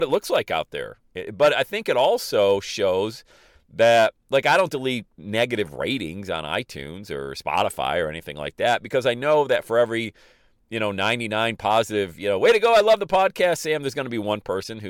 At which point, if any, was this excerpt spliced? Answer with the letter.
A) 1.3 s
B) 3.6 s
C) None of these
C